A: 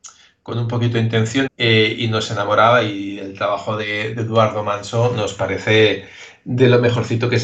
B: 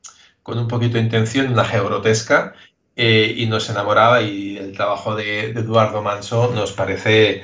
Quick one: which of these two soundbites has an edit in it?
A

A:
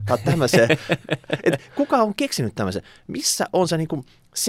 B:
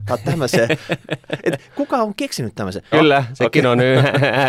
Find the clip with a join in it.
B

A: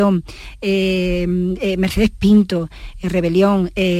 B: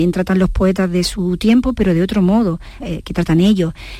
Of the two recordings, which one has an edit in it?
B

